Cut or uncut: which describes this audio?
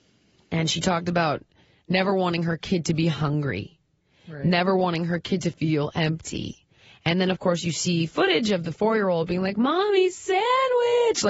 uncut